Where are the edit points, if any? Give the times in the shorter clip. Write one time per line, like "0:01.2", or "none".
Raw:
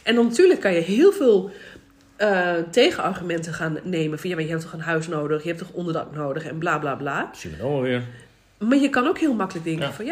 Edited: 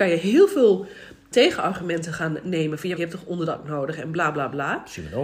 0:01.3
0:03.0